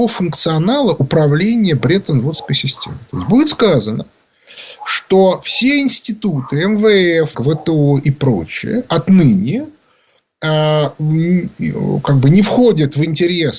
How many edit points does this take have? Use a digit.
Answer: 1